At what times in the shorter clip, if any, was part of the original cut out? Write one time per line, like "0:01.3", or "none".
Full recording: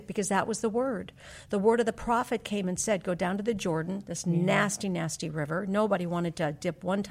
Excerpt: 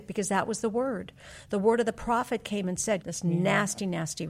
0:03.0

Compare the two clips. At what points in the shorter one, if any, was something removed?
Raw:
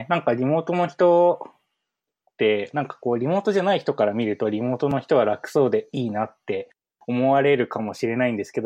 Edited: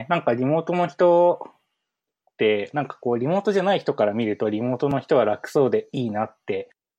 none

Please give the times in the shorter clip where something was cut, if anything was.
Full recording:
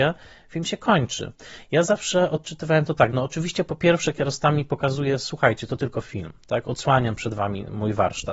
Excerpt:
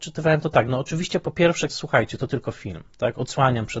0:01.7

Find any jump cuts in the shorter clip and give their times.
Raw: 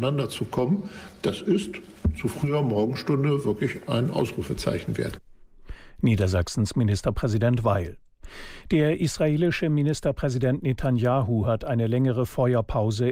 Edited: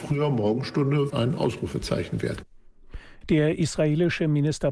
0:01.1
0:03.2

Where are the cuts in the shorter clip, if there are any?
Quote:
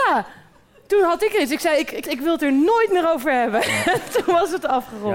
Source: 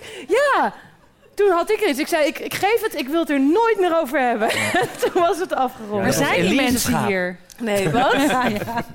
0:02.0

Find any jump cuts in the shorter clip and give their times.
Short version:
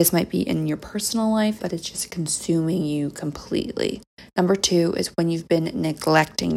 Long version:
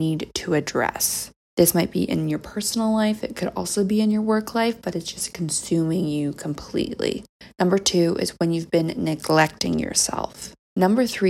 0:01.6

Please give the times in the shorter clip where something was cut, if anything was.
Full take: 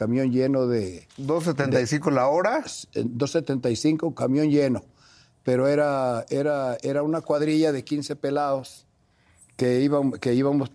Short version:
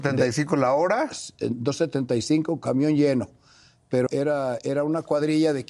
0:04.1

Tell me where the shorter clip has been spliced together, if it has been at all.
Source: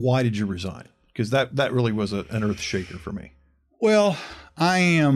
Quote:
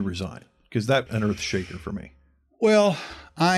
0:01.1

